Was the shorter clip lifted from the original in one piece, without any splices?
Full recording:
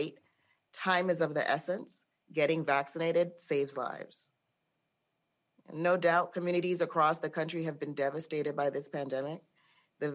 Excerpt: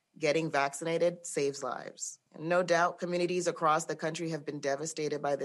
no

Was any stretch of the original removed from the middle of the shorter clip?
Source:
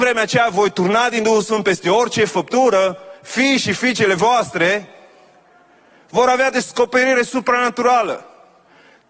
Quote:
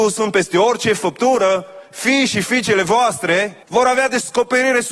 yes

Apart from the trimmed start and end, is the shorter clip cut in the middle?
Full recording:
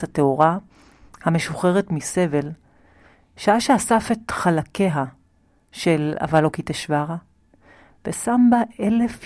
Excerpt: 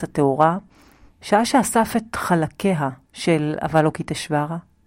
yes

